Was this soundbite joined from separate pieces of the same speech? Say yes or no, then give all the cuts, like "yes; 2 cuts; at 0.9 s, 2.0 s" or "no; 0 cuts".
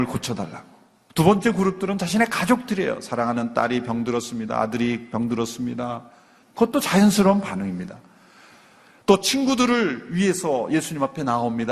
yes; 2 cuts; at 1.1 s, 6.4 s